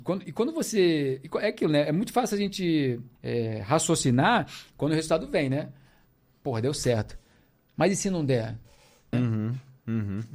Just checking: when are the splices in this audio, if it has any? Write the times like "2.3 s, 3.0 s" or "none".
3.2 s, 9.1 s